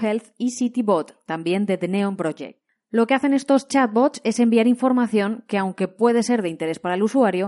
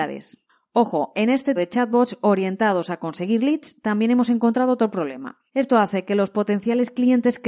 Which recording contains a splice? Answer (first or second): second